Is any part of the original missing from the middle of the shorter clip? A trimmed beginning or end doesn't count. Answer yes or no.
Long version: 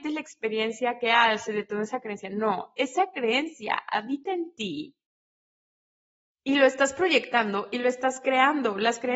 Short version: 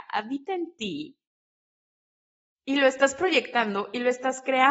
no